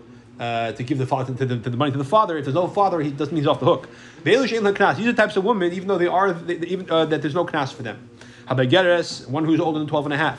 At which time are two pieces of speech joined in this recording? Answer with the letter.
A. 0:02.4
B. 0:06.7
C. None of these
C